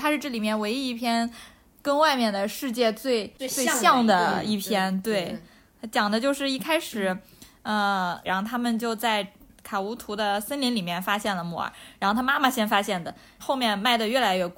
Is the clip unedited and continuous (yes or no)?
no